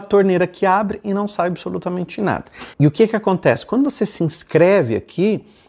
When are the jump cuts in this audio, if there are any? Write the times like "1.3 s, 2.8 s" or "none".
2.7 s

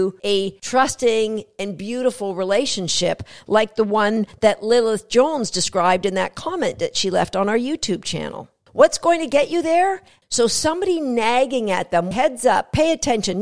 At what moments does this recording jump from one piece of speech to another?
10.2 s, 12.1 s

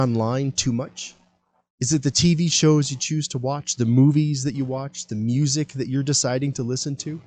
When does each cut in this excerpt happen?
none

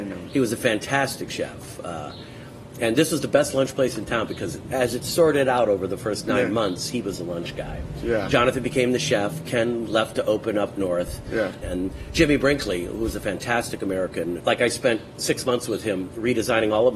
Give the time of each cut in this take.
11.6 s, 14.4 s

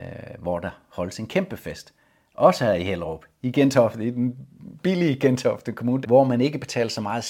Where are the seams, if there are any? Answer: 6.0 s

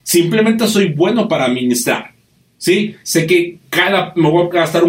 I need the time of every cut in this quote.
3.0 s

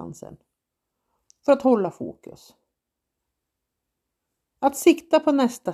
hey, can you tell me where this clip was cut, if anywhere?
none

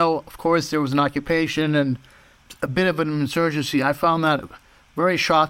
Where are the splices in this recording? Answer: none

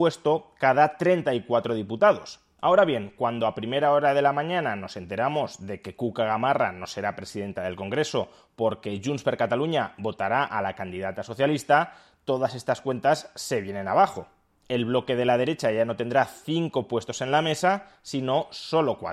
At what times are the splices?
2.6 s

